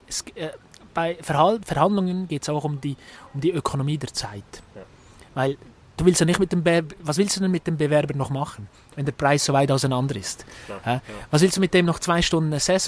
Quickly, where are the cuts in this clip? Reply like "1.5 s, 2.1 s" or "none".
none